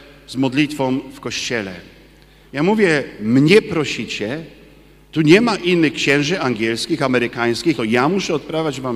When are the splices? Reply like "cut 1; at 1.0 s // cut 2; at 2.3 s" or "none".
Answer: cut 1; at 2.4 s // cut 2; at 7.7 s